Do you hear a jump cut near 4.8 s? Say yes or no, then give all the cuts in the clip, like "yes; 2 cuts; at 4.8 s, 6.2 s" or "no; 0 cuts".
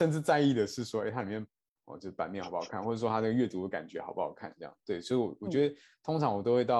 no; 1 cut; at 1.8 s